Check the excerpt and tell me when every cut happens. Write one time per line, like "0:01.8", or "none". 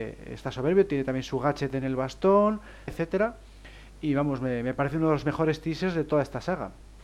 0:02.9